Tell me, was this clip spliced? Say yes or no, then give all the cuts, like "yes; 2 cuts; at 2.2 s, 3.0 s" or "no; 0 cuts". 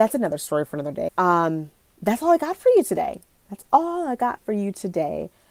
yes; 1 cut; at 1.1 s